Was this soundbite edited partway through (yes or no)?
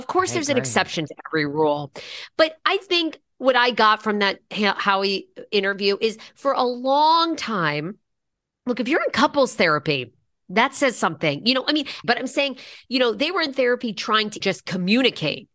yes